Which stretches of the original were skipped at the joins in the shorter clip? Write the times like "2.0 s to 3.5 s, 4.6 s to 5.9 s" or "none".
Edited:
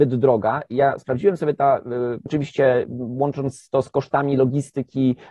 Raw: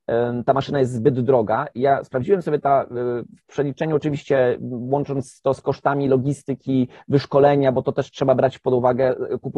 3.3 s to 4.0 s